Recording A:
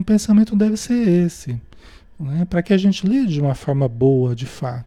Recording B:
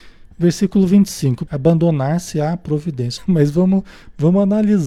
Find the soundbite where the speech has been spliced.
B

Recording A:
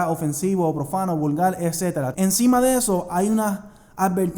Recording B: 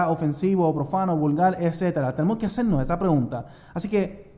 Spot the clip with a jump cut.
A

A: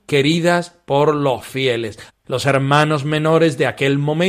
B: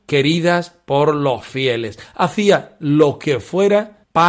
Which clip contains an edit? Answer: A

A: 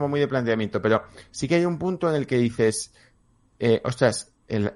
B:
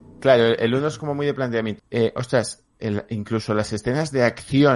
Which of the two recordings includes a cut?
B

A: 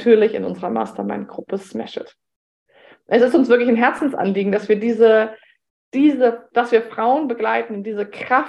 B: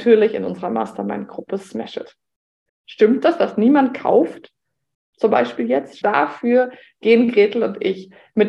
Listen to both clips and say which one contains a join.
B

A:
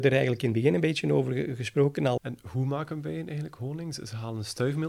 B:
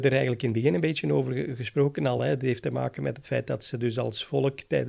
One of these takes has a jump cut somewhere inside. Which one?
A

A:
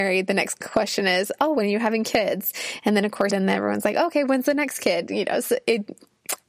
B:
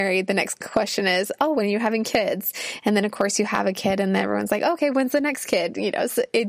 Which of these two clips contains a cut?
A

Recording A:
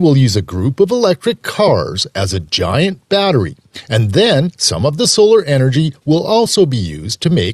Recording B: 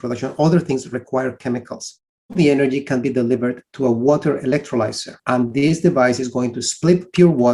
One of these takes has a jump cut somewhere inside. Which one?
B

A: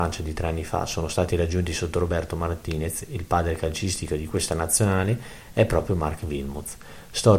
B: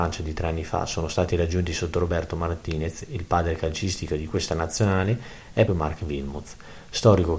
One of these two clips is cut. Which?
B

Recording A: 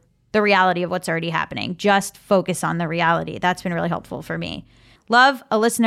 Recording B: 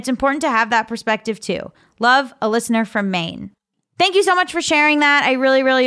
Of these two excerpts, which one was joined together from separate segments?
A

